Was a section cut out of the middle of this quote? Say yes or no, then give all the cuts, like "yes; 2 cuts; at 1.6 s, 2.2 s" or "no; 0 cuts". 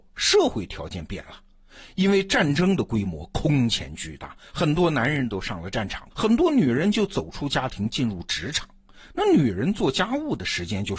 yes; 1 cut; at 6.1 s